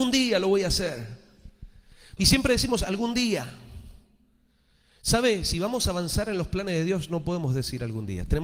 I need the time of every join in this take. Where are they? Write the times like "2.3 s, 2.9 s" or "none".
2.2 s